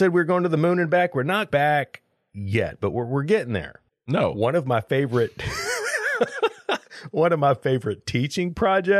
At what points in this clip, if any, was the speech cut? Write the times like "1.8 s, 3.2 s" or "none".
1.5 s, 3.9 s

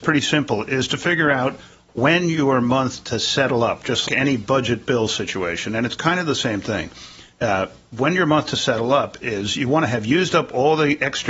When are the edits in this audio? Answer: 4.0 s

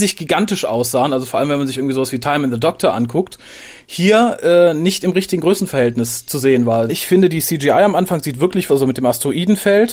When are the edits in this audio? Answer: 6.9 s, 8.7 s

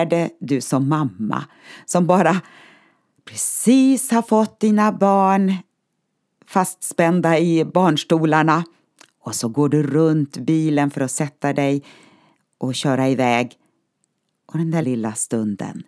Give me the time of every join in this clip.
14.8 s

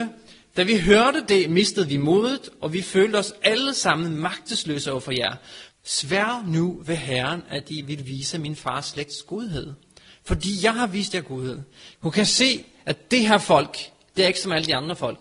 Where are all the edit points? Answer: 5.7 s, 11.9 s

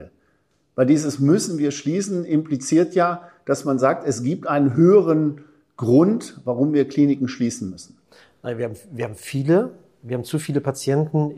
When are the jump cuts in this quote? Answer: none

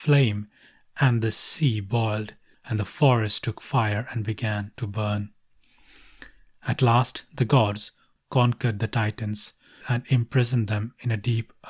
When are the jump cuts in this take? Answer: 2.5 s, 8.2 s, 9.8 s

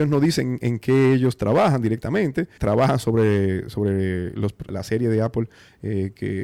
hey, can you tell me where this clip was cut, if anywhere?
2.6 s, 4.7 s

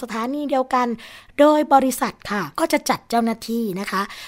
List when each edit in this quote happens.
2.5 s

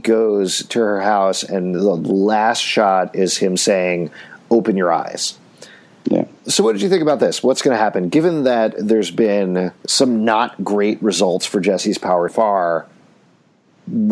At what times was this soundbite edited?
9.8 s, 12.3 s

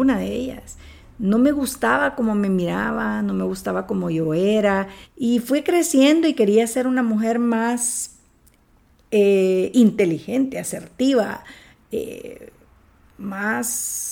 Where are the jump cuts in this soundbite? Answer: 5.0 s

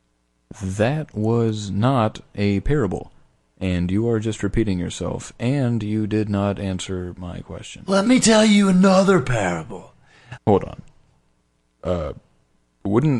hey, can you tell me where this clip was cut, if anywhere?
10.4 s

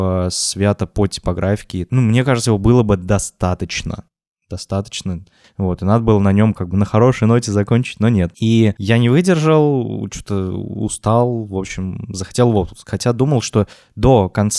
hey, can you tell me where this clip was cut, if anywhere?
none

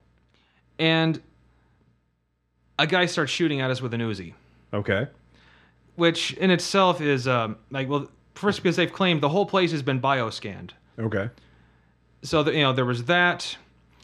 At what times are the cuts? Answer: 10.9 s

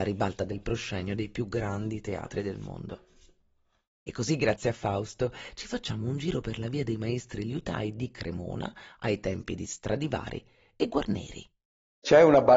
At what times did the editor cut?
none

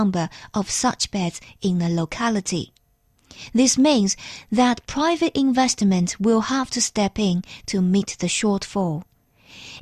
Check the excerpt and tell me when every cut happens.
none

